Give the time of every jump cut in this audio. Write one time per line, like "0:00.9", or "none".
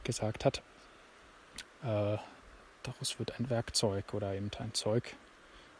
0:01.6